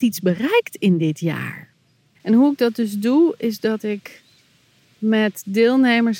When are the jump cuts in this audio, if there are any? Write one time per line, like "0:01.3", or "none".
0:02.2